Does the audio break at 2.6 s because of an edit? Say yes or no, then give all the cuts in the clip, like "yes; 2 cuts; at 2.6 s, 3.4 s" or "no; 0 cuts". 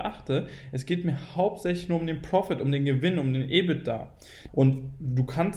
no; 1 cut; at 4.5 s